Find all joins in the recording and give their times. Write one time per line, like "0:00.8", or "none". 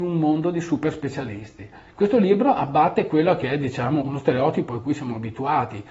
0:04.0